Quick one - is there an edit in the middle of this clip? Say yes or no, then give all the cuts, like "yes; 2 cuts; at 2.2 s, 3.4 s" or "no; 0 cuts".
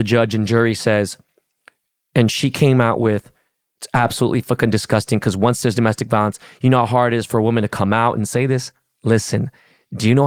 no; 0 cuts